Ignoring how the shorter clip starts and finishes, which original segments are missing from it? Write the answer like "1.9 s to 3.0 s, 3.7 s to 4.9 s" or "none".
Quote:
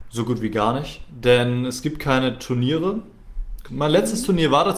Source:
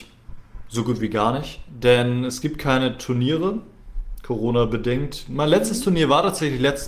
4.3 s to 5.3 s